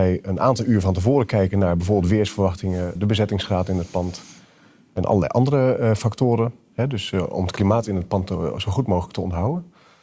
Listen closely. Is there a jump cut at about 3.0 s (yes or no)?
yes